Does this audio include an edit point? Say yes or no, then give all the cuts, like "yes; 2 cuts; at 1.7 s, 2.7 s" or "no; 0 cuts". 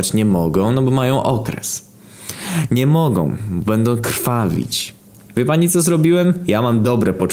no; 0 cuts